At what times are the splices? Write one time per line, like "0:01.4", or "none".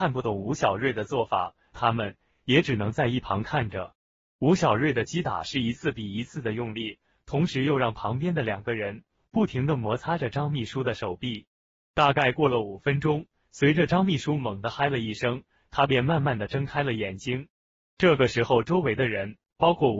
0:01.7